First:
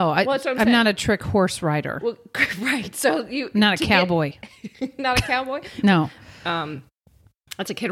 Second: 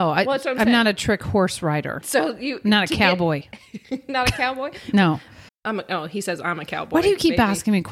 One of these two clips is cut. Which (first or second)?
second